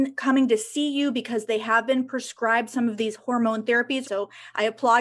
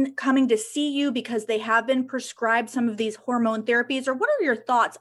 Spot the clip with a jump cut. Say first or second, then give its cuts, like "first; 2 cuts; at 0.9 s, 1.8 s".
first; 1 cut; at 4.0 s